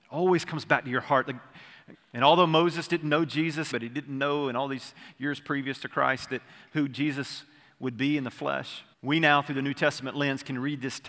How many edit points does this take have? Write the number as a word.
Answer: three